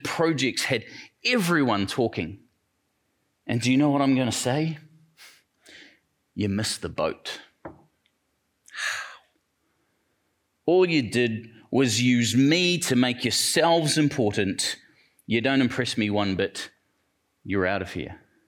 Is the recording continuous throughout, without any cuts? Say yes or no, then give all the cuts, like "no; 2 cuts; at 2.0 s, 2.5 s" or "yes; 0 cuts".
yes; 0 cuts